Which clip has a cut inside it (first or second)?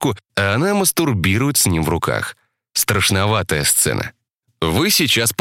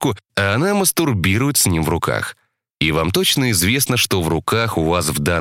second